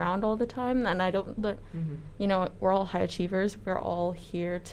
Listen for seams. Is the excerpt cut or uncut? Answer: cut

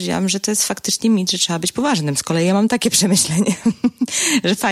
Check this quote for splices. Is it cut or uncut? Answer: uncut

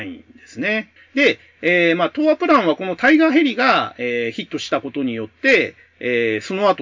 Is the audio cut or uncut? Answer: cut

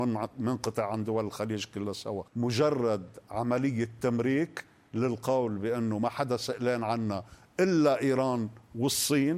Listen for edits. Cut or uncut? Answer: cut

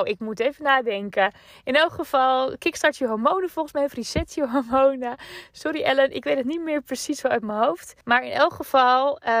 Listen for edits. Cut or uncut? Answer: cut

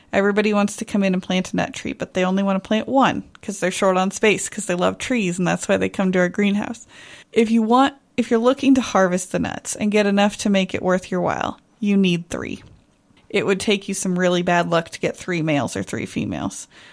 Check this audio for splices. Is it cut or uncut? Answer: cut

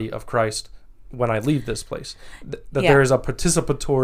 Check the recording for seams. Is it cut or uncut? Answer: uncut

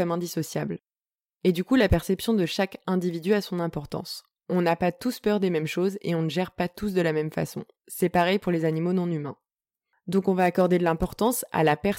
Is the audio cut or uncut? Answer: cut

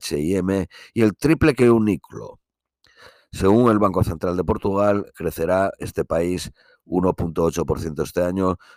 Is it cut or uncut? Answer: cut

